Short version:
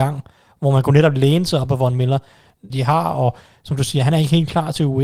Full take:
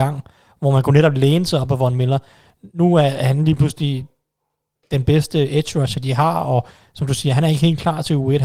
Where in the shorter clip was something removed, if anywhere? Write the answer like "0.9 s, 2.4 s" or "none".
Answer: 2.7 s